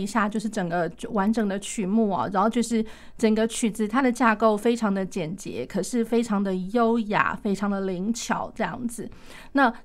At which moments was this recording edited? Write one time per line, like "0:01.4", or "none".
none